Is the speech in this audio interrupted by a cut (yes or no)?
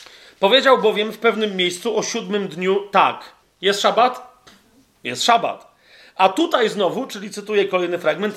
yes